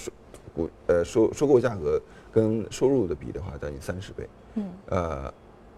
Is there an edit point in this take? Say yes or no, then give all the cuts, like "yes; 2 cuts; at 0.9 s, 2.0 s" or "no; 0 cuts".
no; 0 cuts